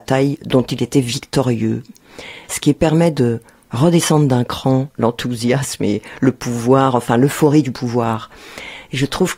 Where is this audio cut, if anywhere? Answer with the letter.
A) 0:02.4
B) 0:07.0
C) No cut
A